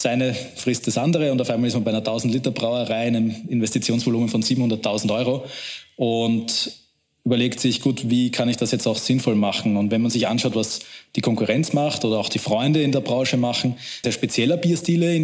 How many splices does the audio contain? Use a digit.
1